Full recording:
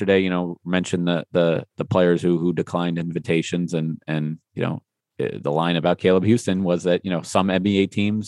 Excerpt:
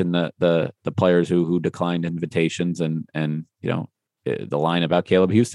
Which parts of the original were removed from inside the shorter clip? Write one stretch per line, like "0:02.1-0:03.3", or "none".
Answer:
none